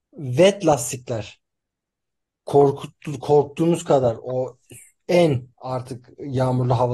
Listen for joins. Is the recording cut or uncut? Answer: uncut